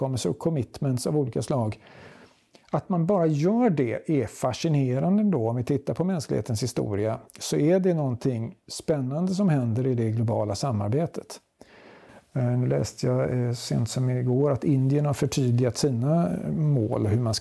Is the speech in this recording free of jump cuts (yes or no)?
yes